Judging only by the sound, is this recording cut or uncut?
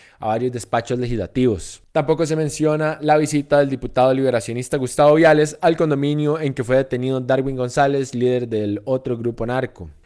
cut